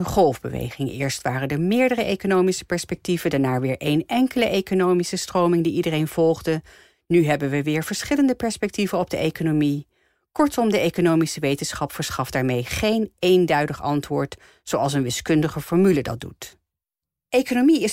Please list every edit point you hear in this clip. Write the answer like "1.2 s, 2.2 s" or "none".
none

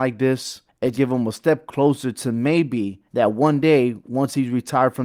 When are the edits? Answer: 0.9 s, 3.1 s

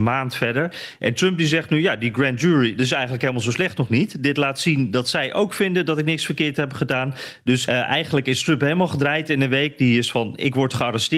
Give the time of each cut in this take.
7.7 s

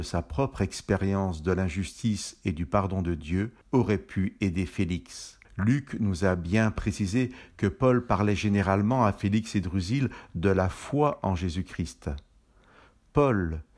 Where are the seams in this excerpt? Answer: 3.6 s, 5.4 s

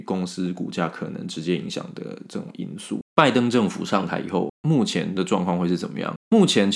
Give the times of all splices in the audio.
3.0 s

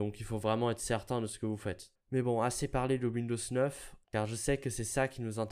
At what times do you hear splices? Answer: 2.0 s, 4.0 s

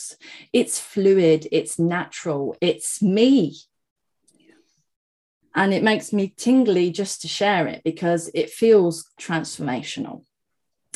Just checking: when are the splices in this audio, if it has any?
5.4 s, 9.2 s

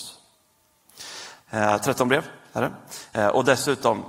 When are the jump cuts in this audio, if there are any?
1.4 s

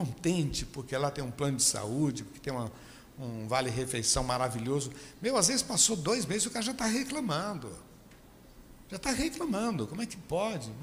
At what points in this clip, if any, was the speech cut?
none

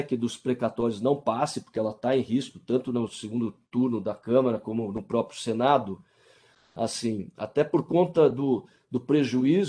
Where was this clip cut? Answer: none

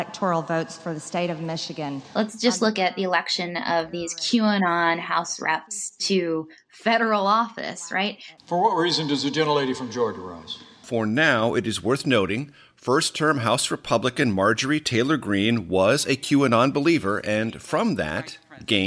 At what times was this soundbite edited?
8.4 s, 10.8 s

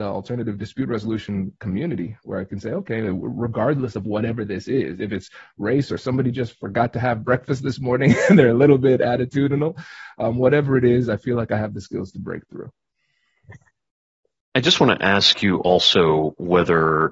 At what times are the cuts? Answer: none

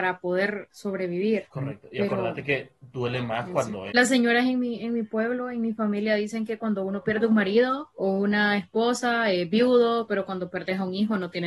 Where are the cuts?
3.9 s, 10.1 s

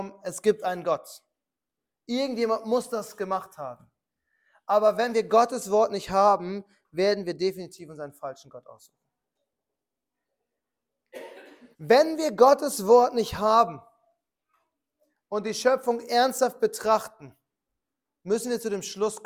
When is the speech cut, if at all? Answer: 11.7 s

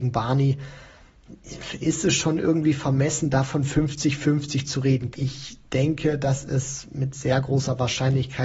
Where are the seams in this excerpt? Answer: 1.8 s, 5.1 s

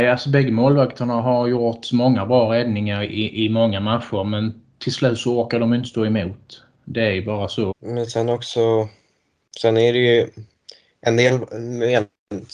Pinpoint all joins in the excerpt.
7.7 s

